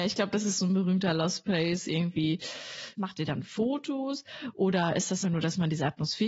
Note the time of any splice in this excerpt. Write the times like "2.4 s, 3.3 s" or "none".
3.0 s, 5.2 s